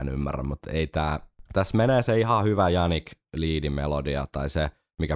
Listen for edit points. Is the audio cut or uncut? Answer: cut